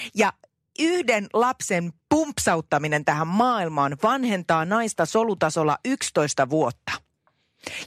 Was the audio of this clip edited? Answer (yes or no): yes